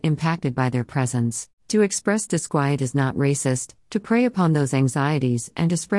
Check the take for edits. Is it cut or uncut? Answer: cut